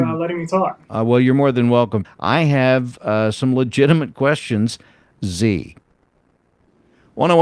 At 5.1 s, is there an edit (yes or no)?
yes